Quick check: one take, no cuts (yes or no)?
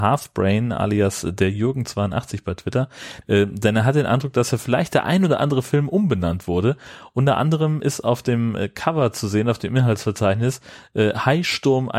no